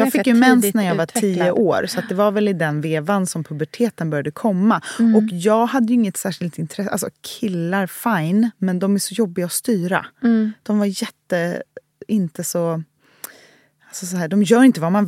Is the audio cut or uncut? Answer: uncut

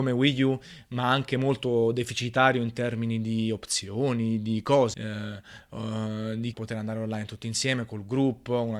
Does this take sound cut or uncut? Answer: cut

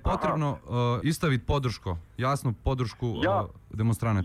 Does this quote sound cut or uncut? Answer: cut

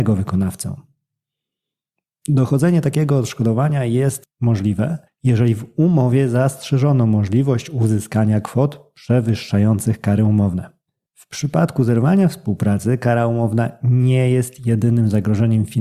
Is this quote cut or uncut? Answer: cut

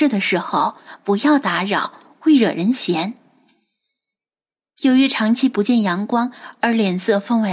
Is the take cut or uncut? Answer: uncut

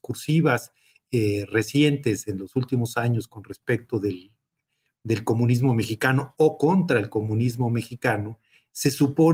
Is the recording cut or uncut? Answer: uncut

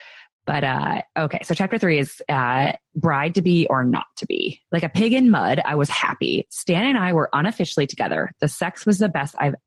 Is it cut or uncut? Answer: cut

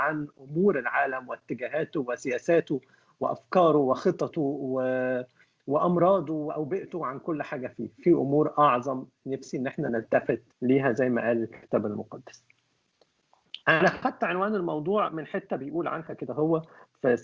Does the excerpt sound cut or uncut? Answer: cut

